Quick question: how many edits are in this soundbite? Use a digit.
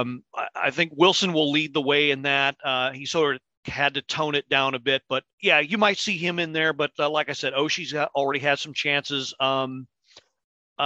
1